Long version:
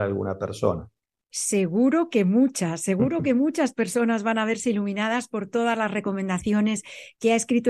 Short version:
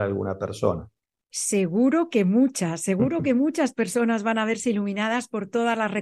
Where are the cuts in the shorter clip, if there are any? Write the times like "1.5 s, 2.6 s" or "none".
none